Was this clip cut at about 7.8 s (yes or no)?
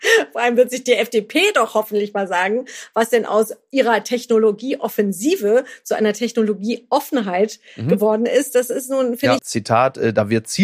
no